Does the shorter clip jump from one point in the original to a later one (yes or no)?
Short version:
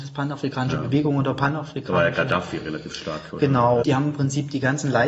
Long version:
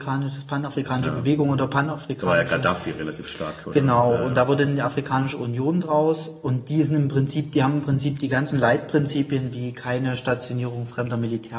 yes